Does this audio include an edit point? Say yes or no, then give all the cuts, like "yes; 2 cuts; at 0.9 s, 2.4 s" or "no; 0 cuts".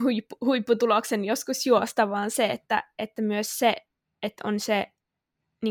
no; 0 cuts